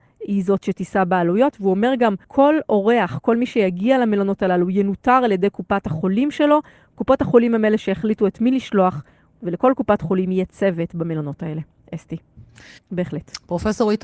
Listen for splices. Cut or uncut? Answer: cut